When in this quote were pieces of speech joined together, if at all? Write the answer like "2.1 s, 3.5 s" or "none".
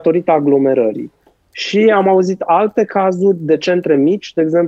none